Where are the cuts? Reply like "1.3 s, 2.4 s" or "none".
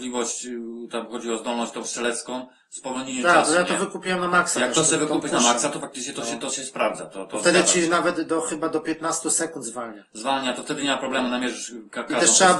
none